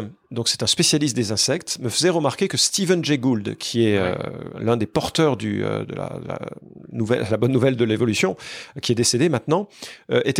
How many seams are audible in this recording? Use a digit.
0